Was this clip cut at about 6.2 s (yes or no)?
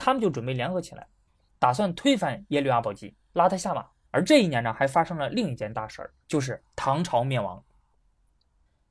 yes